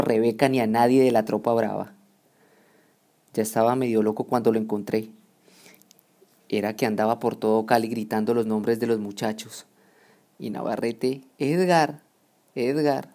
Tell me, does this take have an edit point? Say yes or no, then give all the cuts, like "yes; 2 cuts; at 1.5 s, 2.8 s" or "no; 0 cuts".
yes; 1 cut; at 10.3 s